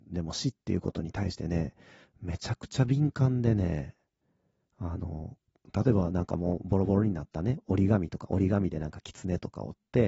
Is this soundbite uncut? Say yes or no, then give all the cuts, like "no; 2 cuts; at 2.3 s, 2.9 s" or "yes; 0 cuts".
yes; 0 cuts